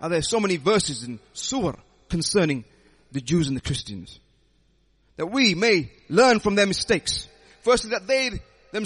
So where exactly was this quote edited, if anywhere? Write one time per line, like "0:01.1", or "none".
none